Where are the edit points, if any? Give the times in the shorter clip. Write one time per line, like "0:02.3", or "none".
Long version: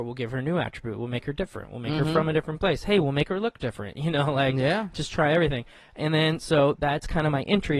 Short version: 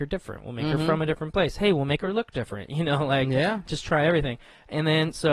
none